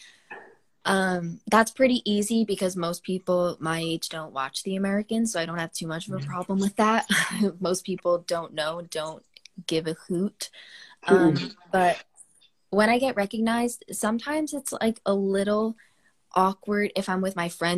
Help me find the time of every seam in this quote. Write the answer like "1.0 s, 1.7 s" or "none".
none